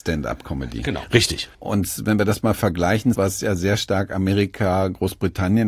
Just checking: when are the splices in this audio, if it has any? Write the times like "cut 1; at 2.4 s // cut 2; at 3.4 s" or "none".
cut 1; at 1.5 s // cut 2; at 3.1 s